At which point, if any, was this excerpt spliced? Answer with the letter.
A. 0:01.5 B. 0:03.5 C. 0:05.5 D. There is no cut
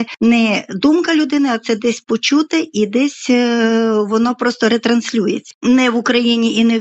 C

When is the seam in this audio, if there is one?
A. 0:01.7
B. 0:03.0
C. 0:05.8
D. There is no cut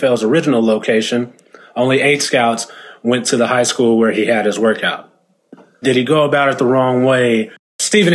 C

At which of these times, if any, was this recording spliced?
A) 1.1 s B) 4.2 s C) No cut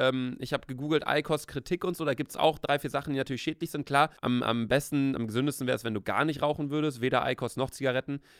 B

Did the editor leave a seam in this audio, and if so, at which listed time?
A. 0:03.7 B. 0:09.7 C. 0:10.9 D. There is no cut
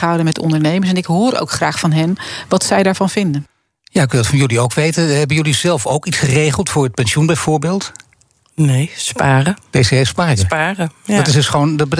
B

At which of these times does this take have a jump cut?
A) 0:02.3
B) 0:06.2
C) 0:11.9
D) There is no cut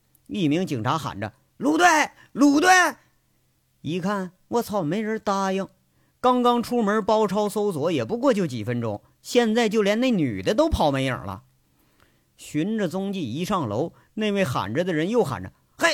D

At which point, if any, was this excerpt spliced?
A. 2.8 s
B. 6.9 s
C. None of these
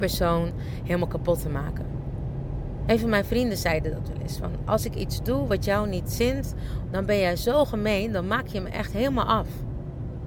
B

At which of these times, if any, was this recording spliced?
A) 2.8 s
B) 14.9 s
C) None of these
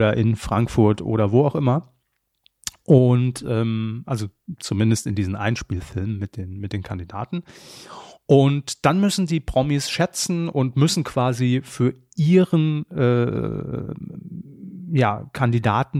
C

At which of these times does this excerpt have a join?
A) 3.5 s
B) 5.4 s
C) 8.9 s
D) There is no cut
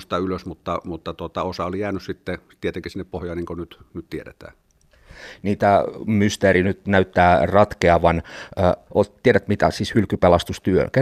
C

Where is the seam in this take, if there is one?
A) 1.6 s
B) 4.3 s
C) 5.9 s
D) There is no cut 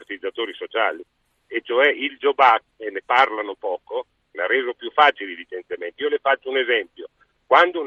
B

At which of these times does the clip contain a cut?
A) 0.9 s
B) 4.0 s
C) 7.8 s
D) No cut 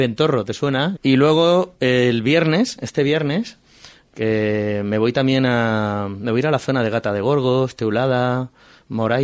A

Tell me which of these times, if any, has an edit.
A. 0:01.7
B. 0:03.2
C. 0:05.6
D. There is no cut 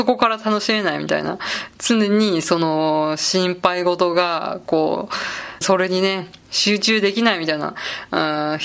C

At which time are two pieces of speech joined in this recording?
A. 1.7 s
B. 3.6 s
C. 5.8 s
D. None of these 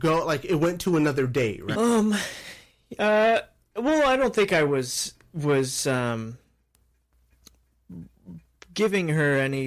A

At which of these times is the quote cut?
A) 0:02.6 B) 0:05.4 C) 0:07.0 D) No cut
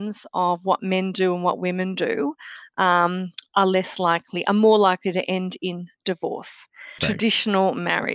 C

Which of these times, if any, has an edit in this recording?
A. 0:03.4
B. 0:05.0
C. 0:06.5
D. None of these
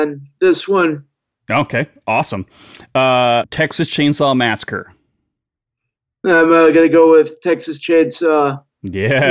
A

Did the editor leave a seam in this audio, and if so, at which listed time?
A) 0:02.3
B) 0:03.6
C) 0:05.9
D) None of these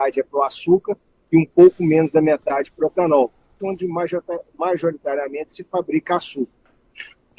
B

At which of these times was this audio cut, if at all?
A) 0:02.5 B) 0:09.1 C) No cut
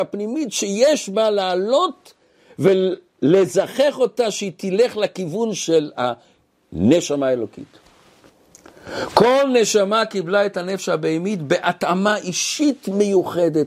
C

